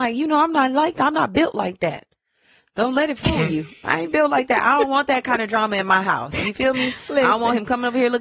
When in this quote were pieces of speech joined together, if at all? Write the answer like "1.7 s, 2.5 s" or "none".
none